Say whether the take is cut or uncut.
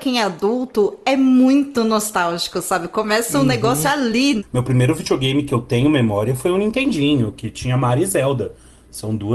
uncut